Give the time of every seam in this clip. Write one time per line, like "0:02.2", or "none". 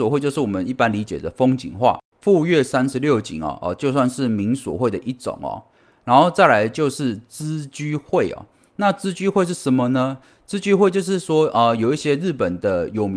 none